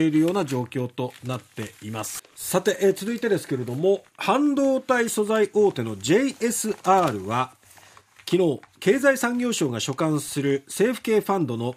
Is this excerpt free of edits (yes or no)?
no